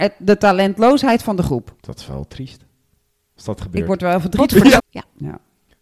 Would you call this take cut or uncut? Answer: cut